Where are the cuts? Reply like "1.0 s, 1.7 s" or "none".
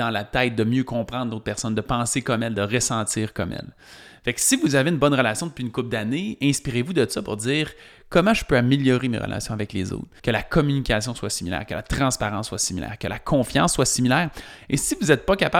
10.2 s